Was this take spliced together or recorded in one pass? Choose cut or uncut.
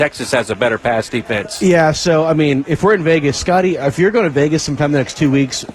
uncut